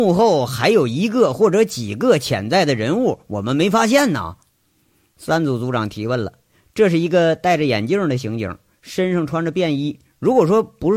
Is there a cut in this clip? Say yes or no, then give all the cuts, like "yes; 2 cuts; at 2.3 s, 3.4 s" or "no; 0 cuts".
no; 0 cuts